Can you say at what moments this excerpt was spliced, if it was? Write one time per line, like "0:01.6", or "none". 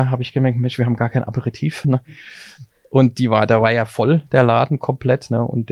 0:01.8